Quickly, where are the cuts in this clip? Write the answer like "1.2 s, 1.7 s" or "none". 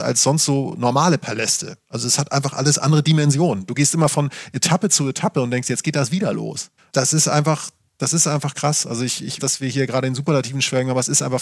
6.8 s, 9.4 s

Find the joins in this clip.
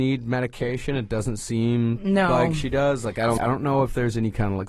3.4 s

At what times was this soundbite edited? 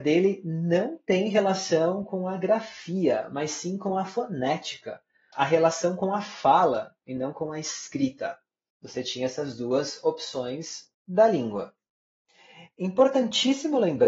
5.3 s, 8.7 s, 10.9 s

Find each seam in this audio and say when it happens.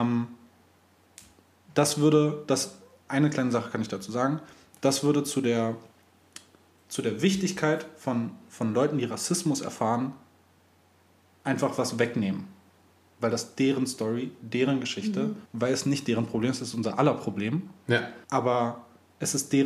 15.5 s, 18.2 s

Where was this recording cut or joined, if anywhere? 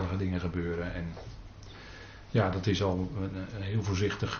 none

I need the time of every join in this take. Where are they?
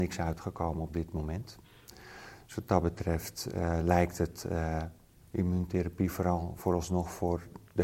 none

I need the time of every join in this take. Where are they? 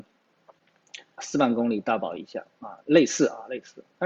1.2 s

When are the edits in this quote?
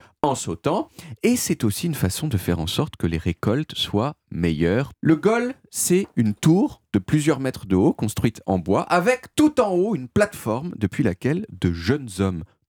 4.9 s

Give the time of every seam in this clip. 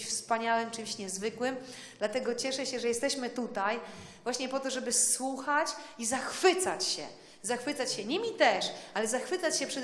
none

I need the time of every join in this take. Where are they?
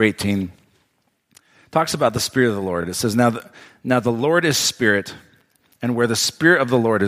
none

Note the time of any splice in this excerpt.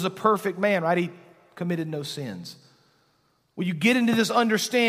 none

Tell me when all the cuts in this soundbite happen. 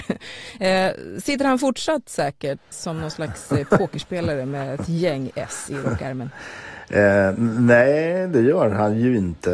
2.7 s

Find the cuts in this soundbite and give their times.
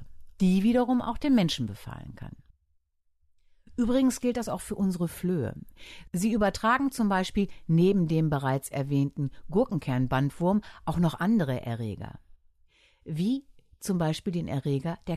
none

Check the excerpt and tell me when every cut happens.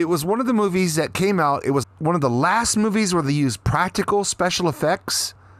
1.8 s

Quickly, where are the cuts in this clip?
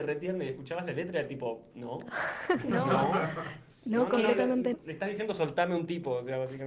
4.7 s

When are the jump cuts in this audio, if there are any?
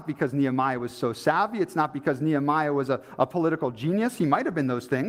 none

